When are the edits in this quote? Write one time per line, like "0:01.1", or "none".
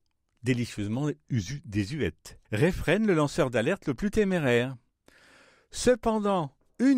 0:02.4